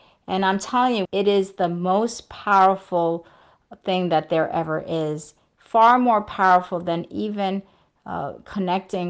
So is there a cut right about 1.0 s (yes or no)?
yes